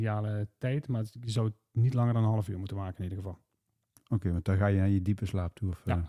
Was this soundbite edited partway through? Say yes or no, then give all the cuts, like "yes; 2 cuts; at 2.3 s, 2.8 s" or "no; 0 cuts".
no; 0 cuts